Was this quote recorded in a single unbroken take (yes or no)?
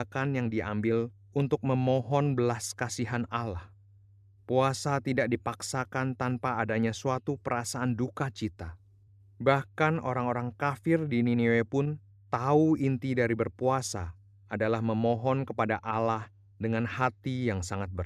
yes